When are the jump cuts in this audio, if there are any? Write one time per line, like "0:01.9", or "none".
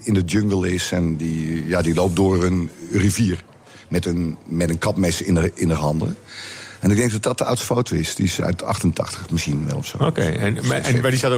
none

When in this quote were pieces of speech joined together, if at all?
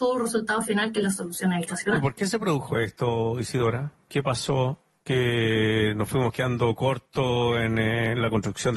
0:04.1

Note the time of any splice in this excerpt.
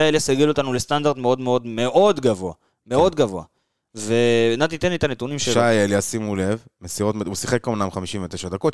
none

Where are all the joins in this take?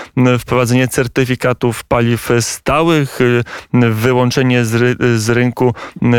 none

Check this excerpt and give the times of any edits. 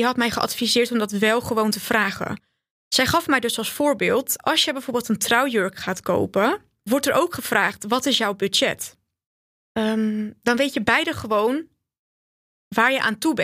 0:06.9

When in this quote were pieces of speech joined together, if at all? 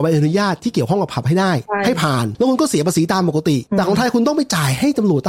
none

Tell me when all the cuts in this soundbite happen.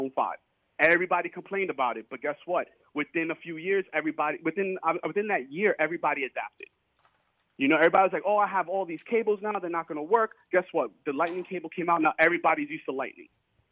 none

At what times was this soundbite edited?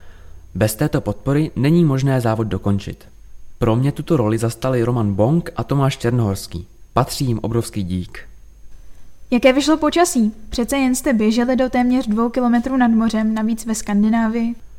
none

